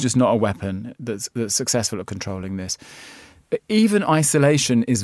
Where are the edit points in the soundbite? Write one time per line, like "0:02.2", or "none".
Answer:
none